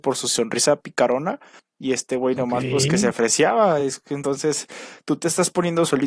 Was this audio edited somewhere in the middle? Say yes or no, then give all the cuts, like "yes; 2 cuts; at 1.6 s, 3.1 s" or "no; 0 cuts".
no; 0 cuts